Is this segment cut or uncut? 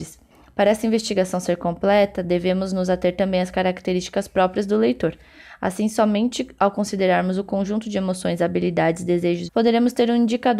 cut